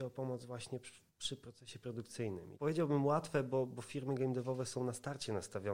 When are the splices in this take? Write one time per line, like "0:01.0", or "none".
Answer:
0:01.1
0:02.5
0:03.7